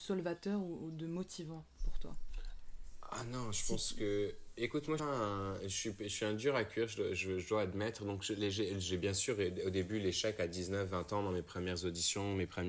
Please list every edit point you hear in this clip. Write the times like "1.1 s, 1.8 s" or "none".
5.0 s